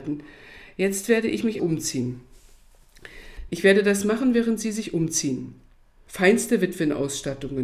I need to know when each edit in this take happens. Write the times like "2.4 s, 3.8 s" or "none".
1.6 s, 3.5 s, 6.1 s